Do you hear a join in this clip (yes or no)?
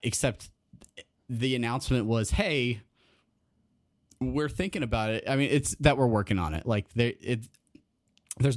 no